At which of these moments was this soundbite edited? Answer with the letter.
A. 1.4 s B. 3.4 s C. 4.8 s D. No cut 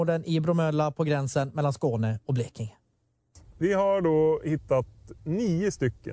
D